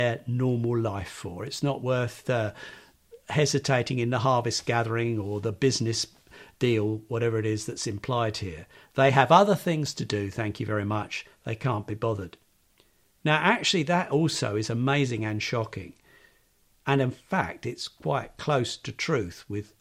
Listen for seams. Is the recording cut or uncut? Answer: uncut